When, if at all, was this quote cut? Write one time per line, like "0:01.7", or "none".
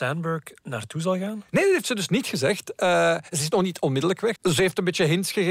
0:04.3